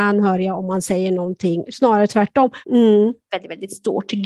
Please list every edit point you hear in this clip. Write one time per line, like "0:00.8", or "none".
0:02.6